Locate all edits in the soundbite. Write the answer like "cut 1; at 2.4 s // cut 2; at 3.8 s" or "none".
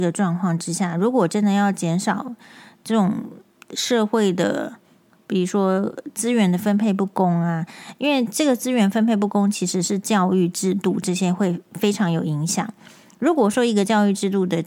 none